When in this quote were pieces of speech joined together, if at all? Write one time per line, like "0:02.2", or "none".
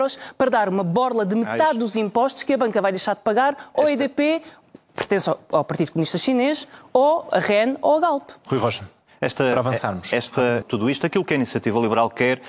0:10.6